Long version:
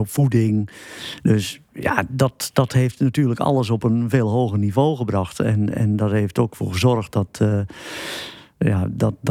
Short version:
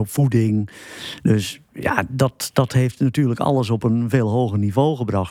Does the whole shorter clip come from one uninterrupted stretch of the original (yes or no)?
yes